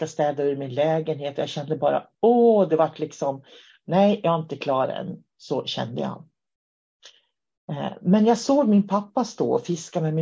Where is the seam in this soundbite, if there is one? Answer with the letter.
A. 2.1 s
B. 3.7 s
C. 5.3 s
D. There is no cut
D